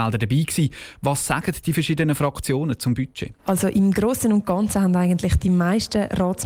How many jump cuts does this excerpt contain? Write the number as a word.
one